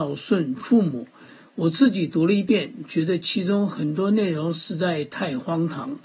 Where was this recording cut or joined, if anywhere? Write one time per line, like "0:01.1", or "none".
none